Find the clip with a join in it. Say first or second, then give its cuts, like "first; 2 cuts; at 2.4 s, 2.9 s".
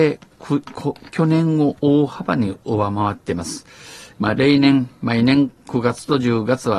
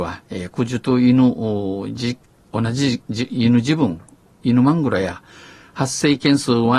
first; 1 cut; at 4.1 s